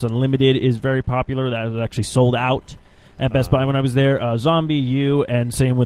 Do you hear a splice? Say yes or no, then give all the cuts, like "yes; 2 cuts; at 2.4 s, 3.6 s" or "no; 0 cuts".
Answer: no; 0 cuts